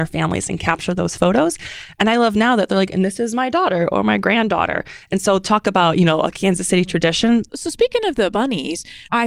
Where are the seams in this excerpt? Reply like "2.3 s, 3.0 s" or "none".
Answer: 7.5 s

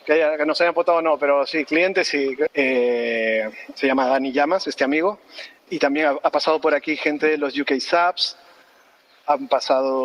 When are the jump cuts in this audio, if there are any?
2.5 s, 5.7 s

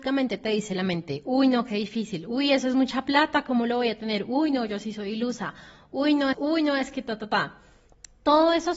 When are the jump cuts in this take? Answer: 6.3 s

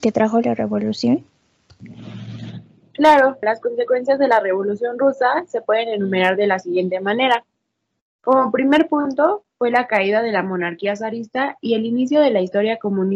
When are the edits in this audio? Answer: 3.4 s

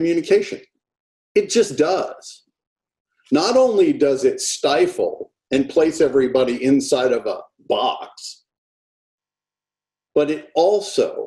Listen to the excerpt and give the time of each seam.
none

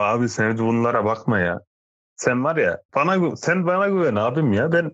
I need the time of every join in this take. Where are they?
2.9 s

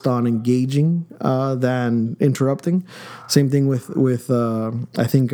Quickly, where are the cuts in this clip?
none

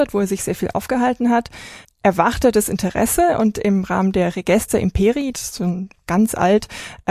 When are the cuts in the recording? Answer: 1.8 s, 5.3 s

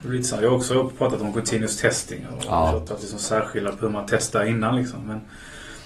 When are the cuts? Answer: 2.9 s

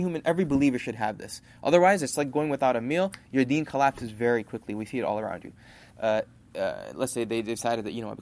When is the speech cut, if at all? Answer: 5.9 s

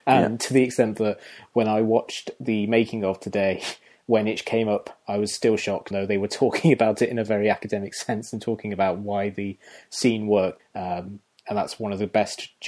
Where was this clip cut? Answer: 5.9 s, 10.6 s

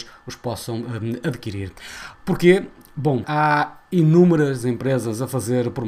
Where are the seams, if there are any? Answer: 2.1 s, 3.2 s

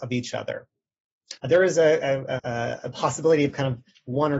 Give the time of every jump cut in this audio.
1.4 s, 2.4 s

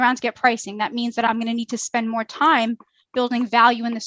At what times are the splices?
none

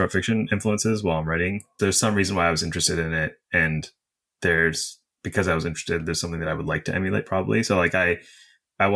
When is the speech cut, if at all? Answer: 1.8 s

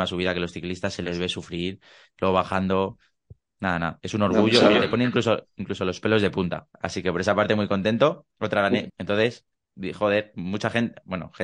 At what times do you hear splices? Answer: 4.0 s, 6.7 s, 8.9 s

